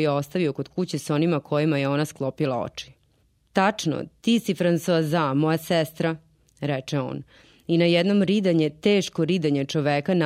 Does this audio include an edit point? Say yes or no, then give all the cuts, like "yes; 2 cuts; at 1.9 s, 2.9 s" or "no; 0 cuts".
no; 0 cuts